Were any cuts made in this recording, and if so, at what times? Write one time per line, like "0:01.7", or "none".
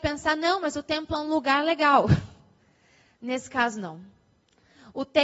none